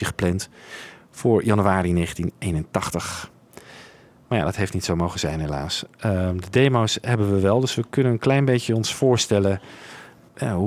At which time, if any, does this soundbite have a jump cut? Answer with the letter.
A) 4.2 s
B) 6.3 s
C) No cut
C